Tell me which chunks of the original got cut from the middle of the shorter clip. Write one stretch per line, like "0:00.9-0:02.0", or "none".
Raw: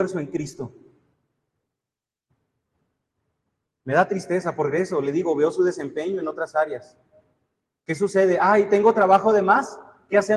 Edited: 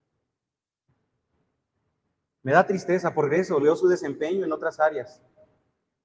0:05.0-0:05.4